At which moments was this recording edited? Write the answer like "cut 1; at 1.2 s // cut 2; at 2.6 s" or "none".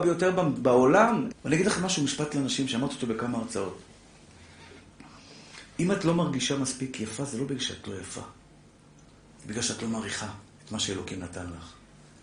cut 1; at 1.3 s

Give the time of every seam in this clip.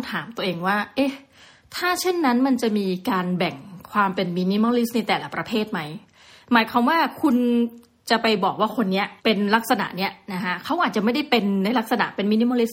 cut 1; at 9.2 s

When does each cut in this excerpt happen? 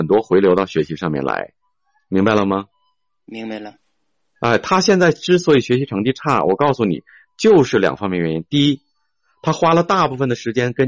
none

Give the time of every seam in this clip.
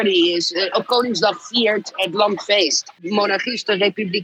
none

